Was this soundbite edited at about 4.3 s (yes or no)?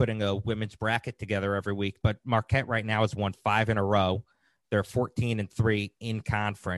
no